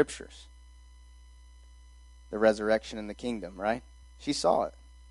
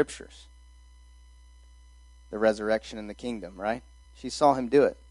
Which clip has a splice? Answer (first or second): second